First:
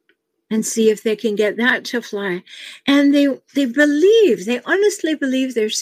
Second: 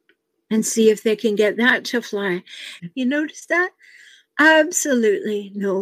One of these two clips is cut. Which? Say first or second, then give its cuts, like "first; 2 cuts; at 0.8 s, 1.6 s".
second; 1 cut; at 2.8 s